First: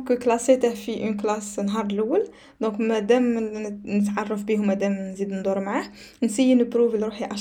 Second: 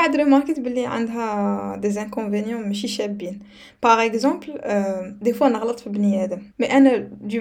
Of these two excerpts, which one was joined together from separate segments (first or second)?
second